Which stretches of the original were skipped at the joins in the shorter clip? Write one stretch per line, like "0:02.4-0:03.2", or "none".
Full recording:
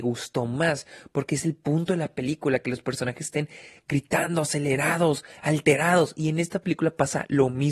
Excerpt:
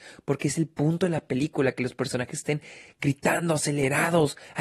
none